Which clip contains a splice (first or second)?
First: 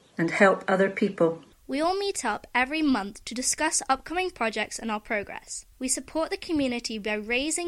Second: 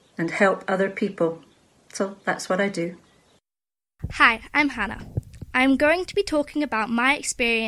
first